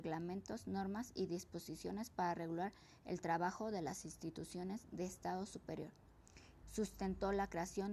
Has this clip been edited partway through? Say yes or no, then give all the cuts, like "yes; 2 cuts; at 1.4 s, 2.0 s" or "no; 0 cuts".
yes; 1 cut; at 6.6 s